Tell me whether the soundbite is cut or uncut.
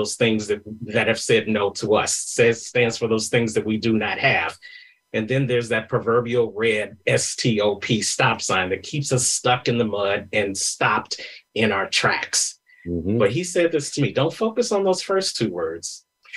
uncut